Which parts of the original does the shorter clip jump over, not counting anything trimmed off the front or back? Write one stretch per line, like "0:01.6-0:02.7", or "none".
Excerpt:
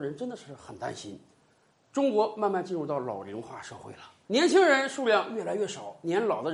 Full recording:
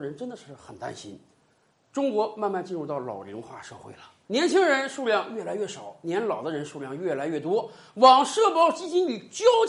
none